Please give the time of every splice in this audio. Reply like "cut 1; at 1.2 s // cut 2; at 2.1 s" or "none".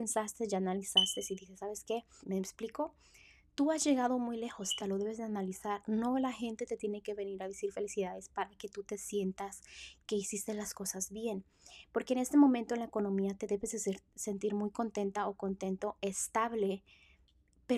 cut 1; at 2.2 s // cut 2; at 4.8 s